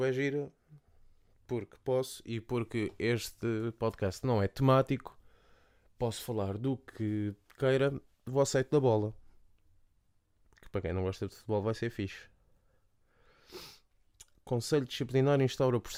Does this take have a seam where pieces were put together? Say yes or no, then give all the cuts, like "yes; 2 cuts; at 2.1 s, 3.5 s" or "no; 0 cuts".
no; 0 cuts